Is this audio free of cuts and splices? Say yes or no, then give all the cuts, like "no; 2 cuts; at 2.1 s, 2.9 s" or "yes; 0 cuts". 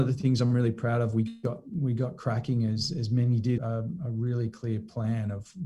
no; 1 cut; at 3.6 s